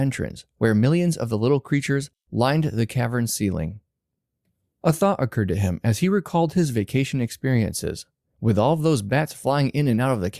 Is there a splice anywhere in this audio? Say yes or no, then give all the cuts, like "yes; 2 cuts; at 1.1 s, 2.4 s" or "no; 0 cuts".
yes; 1 cut; at 8.2 s